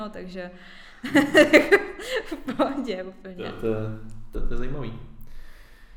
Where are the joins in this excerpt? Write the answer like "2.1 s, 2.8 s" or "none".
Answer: 4.3 s